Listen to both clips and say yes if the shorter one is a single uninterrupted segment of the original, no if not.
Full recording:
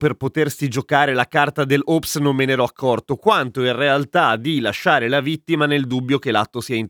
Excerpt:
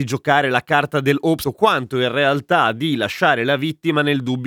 no